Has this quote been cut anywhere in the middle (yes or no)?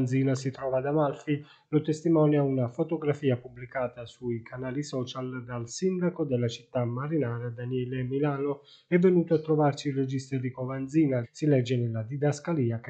yes